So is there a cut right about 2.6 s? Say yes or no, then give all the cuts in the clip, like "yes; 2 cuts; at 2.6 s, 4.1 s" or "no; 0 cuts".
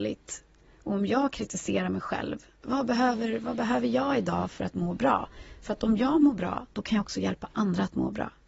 yes; 1 cut; at 2.6 s